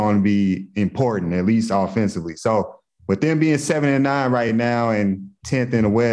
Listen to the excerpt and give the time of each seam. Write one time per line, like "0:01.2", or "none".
none